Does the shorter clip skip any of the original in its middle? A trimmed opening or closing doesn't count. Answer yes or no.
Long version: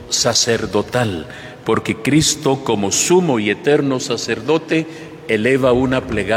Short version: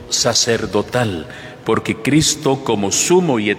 no